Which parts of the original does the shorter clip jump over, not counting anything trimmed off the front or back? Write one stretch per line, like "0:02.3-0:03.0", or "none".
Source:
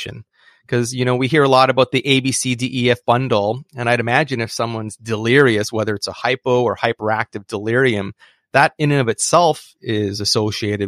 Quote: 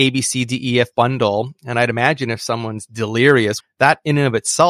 0:05.7-0:08.3